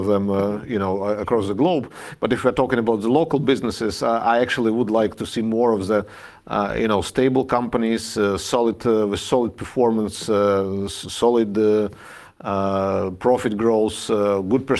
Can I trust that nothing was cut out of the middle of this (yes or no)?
yes